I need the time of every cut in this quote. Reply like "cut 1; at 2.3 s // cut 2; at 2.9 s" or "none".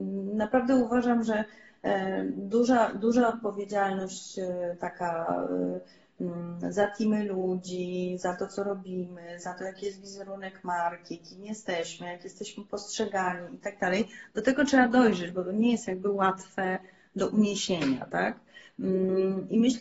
none